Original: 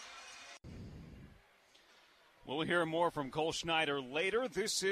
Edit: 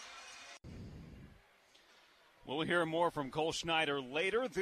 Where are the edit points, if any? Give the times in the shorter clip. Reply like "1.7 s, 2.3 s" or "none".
none

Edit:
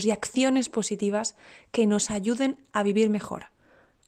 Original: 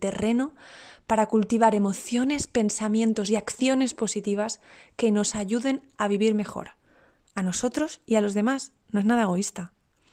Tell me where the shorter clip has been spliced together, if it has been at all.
none

